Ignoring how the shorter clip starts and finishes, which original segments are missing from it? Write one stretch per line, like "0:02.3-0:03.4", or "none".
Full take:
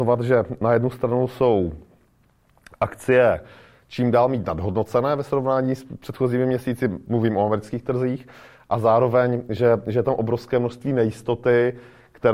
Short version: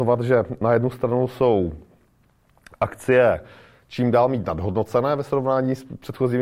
none